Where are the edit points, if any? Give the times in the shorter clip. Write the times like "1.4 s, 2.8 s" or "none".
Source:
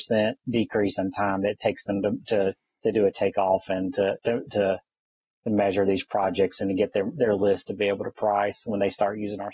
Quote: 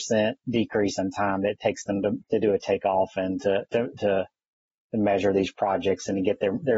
2.2 s